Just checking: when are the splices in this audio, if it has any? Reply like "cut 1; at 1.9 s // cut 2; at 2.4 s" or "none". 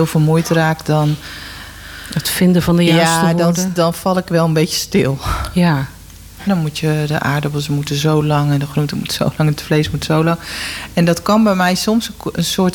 cut 1; at 6.5 s